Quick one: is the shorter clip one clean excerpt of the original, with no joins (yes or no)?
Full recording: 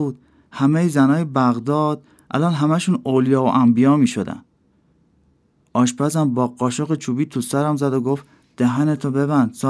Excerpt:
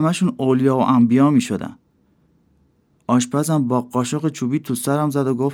yes